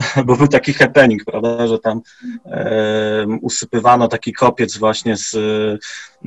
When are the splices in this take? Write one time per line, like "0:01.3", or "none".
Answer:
none